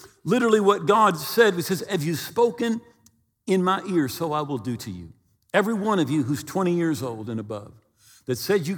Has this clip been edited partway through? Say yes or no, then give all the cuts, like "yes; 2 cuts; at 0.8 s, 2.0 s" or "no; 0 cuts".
no; 0 cuts